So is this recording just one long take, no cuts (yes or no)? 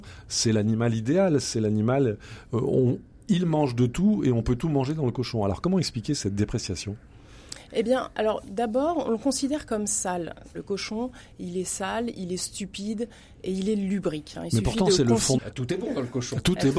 no